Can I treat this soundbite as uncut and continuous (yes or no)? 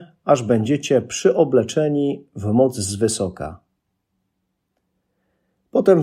yes